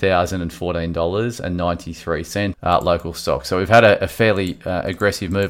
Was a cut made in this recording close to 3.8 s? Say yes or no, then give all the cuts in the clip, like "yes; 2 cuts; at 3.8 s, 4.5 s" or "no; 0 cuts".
no; 1 cut; at 2.5 s